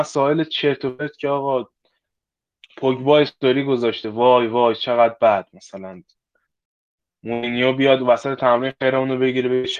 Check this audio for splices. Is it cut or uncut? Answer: uncut